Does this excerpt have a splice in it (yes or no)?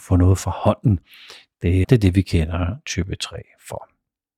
yes